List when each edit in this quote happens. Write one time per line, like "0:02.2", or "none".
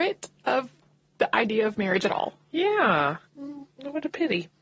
0:03.3